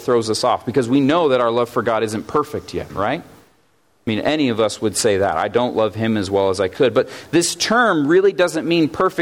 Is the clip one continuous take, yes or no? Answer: yes